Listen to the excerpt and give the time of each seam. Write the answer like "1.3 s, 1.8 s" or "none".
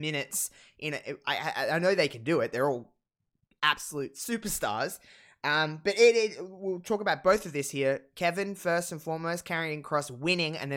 none